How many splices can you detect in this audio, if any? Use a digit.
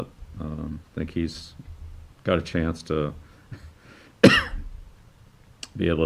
1